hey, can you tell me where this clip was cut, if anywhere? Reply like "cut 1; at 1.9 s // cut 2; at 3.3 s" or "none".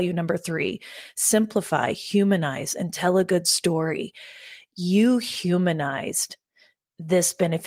none